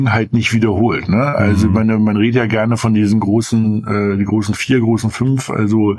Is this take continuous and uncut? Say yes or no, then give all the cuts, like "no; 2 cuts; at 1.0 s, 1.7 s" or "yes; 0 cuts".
yes; 0 cuts